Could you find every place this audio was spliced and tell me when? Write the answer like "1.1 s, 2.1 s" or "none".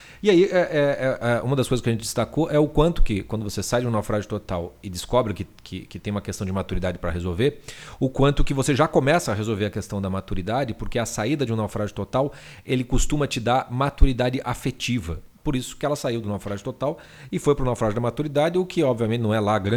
15.4 s